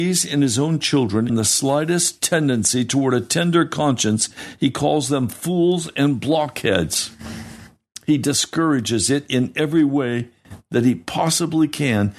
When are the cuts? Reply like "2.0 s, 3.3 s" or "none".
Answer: 1.3 s